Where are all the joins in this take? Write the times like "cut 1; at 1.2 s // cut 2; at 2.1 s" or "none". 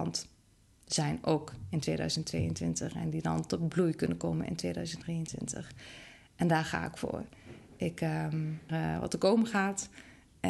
cut 1; at 8.7 s